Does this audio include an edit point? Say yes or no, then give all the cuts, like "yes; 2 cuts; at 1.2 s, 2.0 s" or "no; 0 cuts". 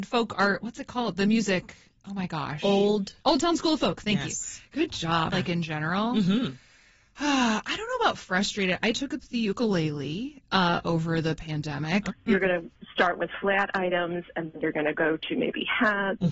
yes; 2 cuts; at 5.3 s, 12.1 s